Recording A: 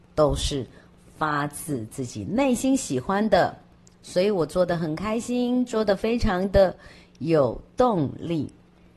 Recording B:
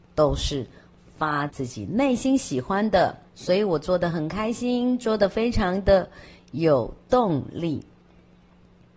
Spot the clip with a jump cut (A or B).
B